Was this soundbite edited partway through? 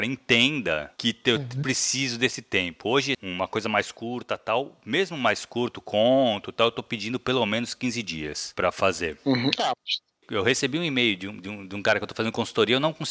yes; 2 cuts; at 3.1 s, 10.2 s

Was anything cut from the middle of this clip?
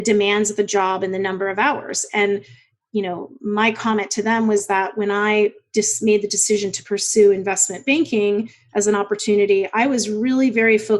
no; 0 cuts

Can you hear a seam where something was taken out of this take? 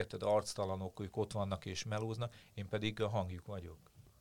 no; 0 cuts

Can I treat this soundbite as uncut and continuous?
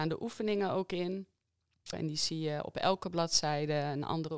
no; 1 cut; at 1.9 s

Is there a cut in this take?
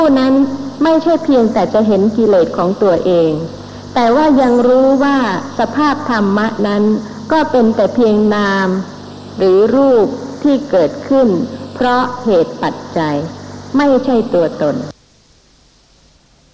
no; 0 cuts

